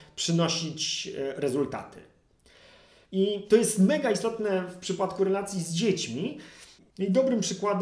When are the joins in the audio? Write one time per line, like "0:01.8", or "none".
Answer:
0:03.1